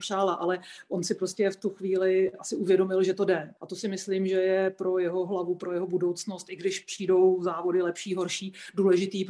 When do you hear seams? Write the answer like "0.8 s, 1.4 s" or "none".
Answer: 3.6 s